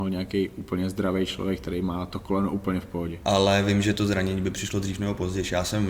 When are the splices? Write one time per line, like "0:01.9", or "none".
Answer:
0:03.2